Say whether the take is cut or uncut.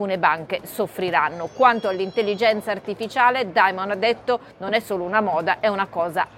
uncut